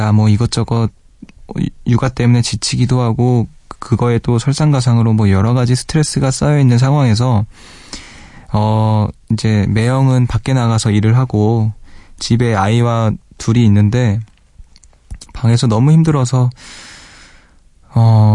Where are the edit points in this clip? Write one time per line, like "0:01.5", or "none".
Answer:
none

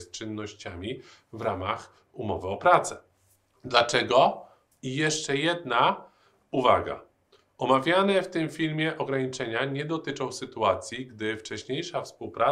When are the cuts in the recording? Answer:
0:04.7

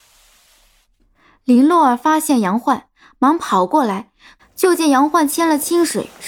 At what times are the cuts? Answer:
0:04.4

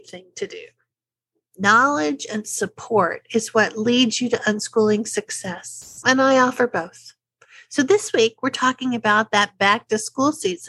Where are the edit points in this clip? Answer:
0:01.5

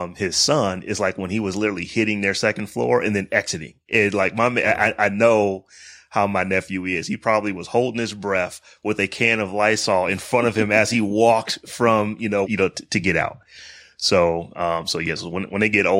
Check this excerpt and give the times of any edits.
0:12.4

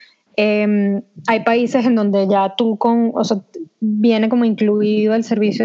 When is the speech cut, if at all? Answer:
none

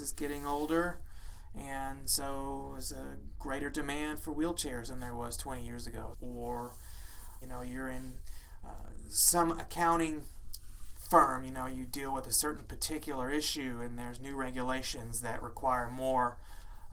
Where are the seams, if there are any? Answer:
0:06.1
0:07.4

